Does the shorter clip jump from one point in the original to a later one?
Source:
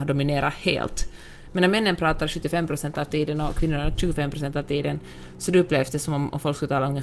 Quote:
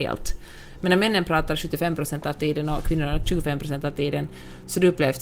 no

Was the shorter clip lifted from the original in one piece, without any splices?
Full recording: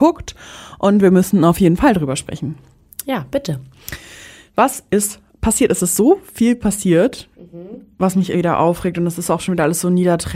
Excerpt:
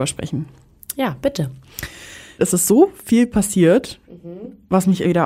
no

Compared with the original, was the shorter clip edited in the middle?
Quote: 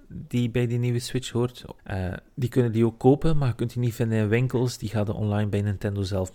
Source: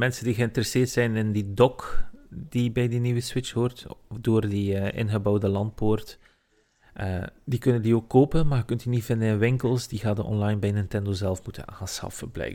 yes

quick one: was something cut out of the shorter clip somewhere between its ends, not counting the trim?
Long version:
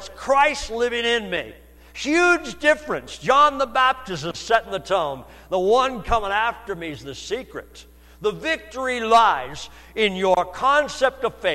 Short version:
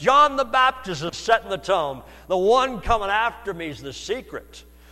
no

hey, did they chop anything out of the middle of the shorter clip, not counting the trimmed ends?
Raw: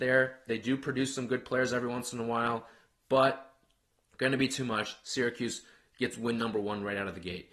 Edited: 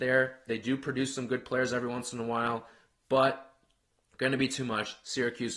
no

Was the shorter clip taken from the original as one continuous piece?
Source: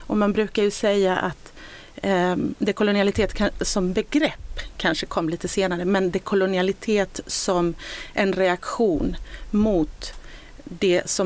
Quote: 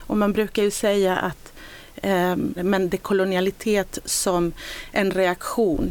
no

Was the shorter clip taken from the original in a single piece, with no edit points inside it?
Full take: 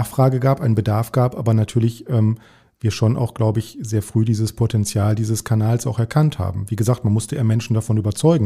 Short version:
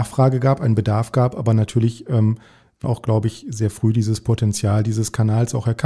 no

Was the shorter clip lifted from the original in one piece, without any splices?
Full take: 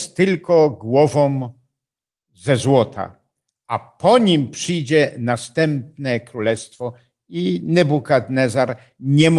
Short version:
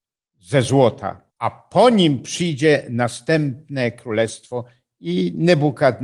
no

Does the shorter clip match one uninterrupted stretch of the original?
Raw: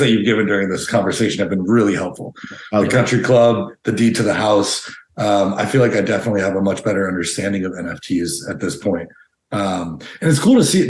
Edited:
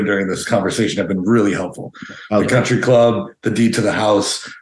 yes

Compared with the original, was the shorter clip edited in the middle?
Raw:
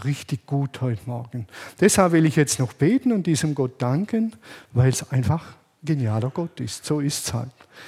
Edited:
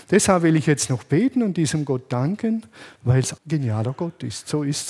yes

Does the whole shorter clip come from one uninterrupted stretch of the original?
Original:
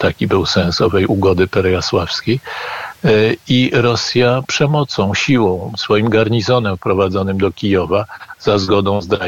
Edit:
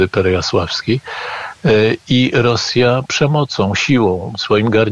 yes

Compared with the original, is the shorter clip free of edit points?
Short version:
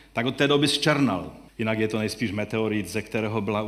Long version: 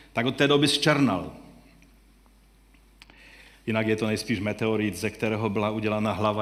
no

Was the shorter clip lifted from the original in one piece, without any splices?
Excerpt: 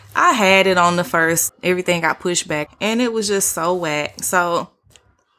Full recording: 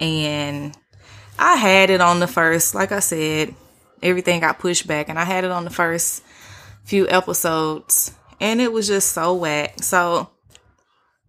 no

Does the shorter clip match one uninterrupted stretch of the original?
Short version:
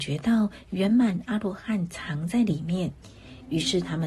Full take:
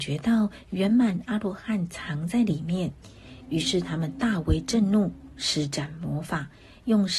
yes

